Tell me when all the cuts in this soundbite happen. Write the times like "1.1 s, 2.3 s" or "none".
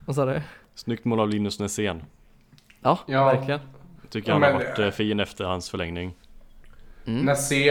none